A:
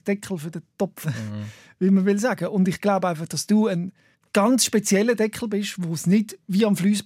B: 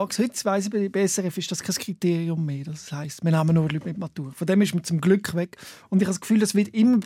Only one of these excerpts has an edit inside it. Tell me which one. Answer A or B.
A